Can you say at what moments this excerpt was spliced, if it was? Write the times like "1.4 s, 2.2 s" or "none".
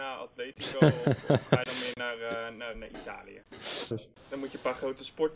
2.7 s, 3.9 s